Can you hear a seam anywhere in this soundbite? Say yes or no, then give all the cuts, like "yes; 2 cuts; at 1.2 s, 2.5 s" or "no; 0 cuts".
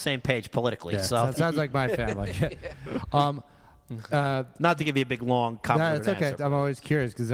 yes; 2 cuts; at 1.3 s, 6.4 s